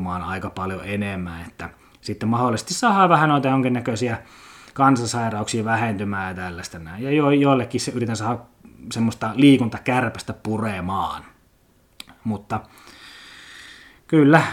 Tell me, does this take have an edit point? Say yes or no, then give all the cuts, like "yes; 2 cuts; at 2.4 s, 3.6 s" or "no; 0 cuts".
no; 0 cuts